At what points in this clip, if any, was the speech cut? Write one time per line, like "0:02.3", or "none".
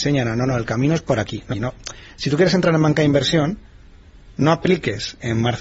0:01.5